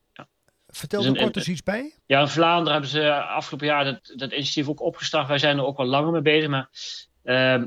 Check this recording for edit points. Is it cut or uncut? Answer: cut